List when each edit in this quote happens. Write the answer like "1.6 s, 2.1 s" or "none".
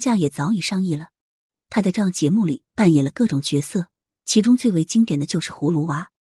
1.6 s

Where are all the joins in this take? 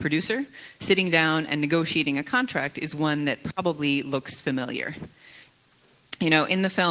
none

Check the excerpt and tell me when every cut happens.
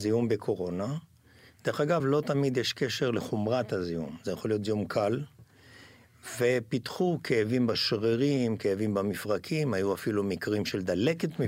none

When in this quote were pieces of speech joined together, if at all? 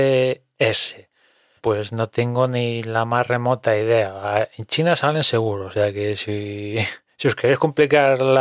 1.6 s

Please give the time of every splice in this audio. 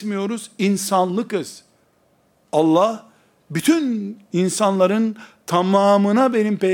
none

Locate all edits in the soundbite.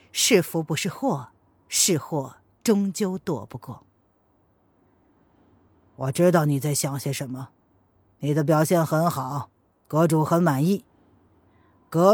none

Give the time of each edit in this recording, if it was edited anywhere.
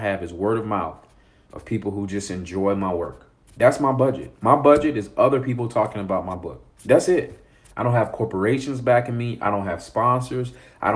3.5 s, 6.7 s

